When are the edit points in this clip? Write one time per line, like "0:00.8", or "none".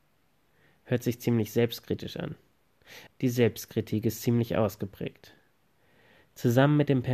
0:03.1